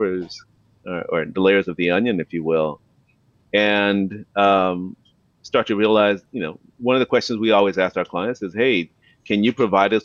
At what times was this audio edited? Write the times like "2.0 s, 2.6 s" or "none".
none